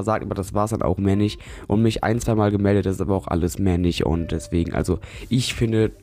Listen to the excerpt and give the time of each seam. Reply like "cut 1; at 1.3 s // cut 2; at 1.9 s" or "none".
none